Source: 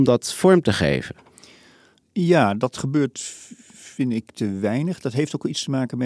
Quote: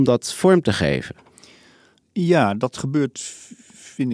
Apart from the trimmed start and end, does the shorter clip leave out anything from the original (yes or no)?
no